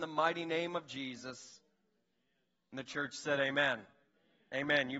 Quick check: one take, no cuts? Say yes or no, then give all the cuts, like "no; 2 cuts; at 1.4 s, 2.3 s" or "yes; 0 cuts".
yes; 0 cuts